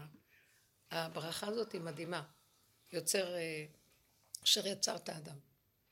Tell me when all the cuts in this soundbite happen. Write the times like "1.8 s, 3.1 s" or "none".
none